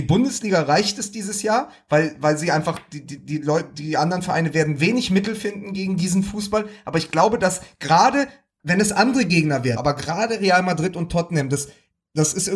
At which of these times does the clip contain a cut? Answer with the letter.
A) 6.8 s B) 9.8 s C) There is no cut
B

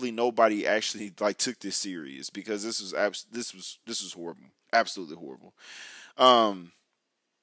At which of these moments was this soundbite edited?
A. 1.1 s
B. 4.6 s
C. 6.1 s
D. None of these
B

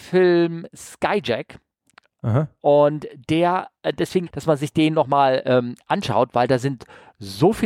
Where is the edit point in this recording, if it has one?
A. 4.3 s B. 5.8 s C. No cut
A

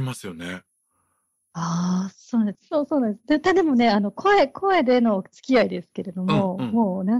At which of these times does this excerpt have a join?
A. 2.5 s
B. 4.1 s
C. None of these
A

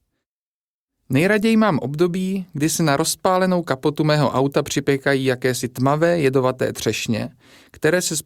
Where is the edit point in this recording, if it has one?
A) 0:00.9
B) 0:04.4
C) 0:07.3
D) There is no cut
D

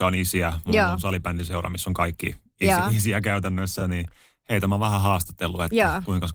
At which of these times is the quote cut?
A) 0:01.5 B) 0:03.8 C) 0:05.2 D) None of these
D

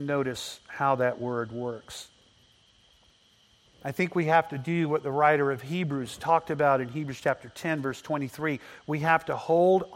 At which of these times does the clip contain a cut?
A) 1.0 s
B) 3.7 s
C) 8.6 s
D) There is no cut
B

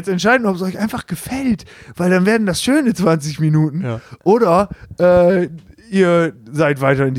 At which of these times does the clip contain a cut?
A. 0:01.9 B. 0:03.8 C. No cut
C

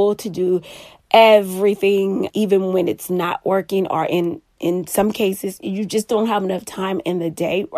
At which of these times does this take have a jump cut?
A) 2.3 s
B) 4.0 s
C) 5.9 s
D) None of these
A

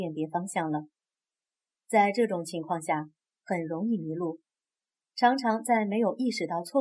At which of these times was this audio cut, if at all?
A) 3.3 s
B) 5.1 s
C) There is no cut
A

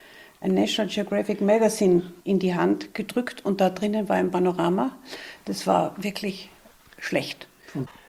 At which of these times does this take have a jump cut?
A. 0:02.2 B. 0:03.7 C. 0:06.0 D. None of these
A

